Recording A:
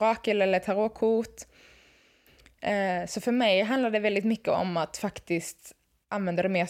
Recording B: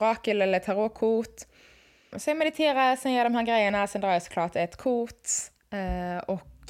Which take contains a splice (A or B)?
B